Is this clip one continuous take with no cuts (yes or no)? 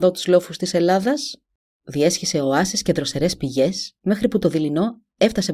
no